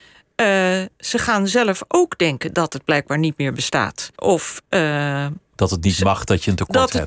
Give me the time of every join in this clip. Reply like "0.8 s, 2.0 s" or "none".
4.1 s